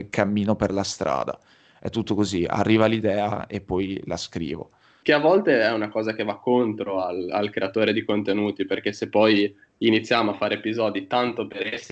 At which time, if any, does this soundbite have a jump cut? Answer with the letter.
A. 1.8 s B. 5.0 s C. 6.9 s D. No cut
B